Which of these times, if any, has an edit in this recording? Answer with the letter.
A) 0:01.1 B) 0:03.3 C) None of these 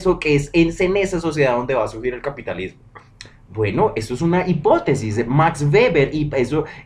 C